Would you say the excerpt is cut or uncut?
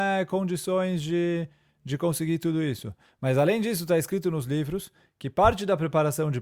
cut